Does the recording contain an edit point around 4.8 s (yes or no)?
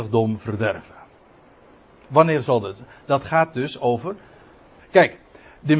yes